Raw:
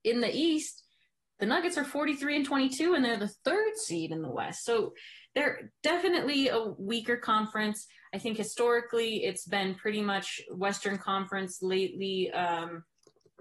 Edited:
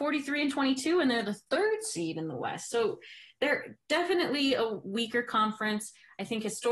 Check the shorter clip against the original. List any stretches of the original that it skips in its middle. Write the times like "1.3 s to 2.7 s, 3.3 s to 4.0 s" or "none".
none